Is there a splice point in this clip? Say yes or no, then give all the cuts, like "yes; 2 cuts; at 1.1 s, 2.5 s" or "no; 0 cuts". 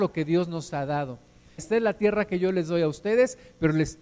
yes; 1 cut; at 1.6 s